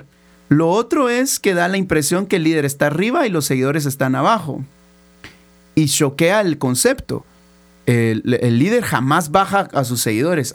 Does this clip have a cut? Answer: no; 0 cuts

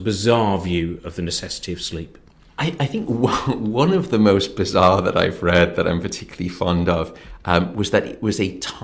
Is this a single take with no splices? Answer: yes; 0 cuts

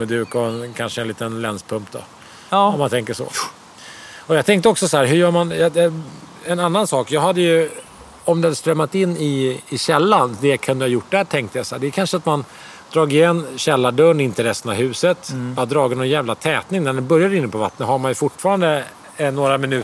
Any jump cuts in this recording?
no; 0 cuts

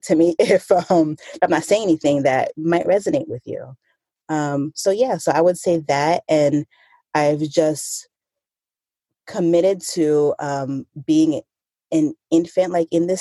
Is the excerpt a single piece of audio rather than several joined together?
yes; 0 cuts

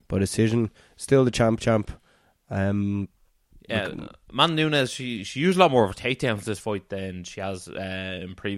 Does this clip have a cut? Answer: no; 0 cuts

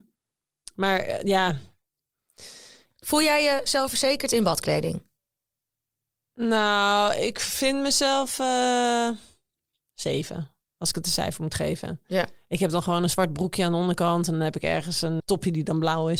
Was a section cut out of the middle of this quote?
yes; 2 cuts; at 12.0 s, 15.2 s

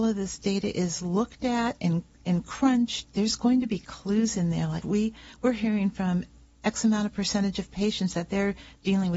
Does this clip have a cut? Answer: yes; 2 cuts; at 3.0 s, 4.8 s

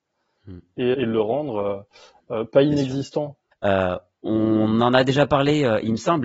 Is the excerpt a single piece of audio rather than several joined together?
no; 2 cuts; at 0.9 s, 3.5 s

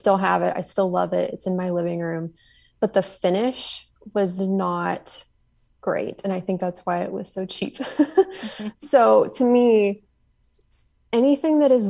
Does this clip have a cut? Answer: no; 0 cuts

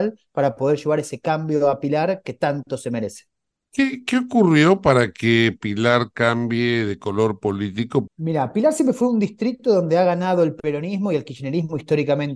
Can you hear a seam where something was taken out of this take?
yes; 1 cut; at 8.1 s

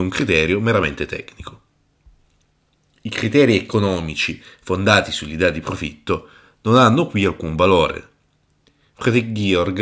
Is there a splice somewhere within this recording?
no; 0 cuts

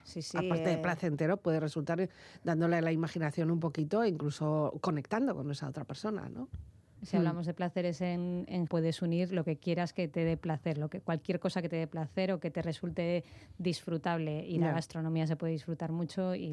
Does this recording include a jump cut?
yes; 2 cuts; at 7.0 s, 8.7 s

